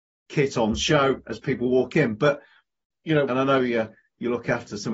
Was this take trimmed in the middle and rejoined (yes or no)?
yes